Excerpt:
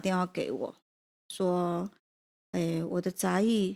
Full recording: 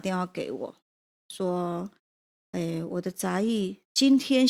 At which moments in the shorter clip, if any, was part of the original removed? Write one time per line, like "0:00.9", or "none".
none